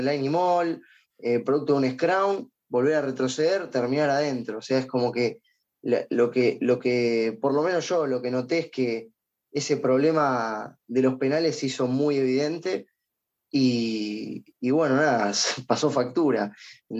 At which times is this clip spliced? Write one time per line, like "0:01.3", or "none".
none